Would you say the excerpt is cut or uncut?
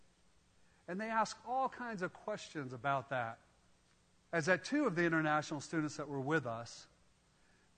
cut